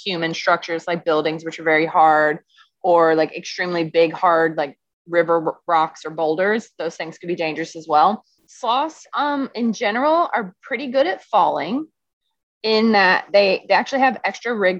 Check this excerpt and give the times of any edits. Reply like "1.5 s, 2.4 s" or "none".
8.4 s